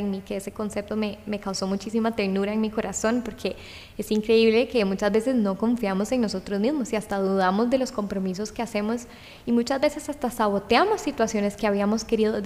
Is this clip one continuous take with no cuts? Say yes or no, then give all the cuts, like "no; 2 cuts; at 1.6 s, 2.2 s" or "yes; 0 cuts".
yes; 0 cuts